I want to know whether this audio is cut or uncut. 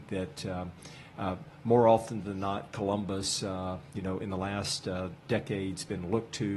uncut